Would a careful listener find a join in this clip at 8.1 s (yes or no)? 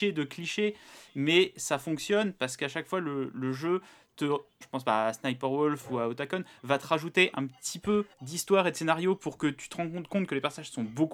yes